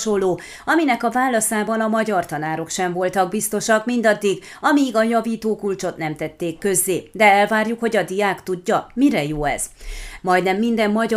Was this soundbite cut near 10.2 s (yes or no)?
yes